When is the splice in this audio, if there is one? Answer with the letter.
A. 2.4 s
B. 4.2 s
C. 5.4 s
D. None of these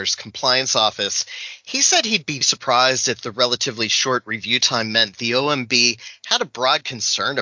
A